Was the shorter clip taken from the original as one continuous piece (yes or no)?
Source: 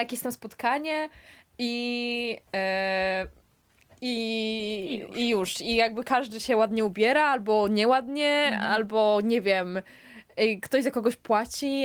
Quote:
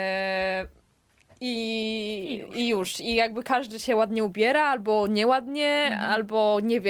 yes